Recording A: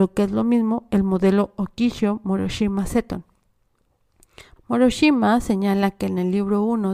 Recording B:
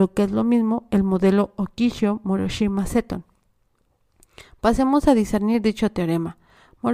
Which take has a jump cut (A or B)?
A